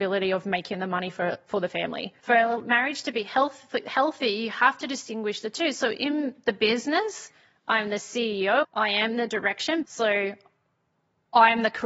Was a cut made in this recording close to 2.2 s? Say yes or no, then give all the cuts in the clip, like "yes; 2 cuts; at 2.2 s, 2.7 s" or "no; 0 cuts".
yes; 3 cuts; at 2.2 s, 8.6 s, 9.8 s